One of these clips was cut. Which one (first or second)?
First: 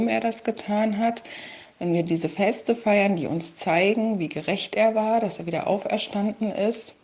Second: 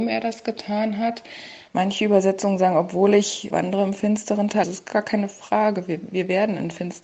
second